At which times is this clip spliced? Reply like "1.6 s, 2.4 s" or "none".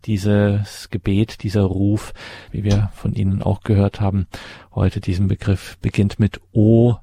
2.5 s